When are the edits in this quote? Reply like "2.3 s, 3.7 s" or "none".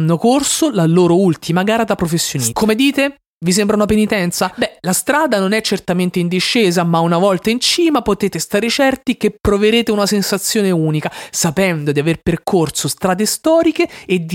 2.5 s